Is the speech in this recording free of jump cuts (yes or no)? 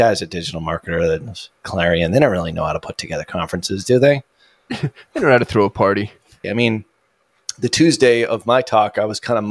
no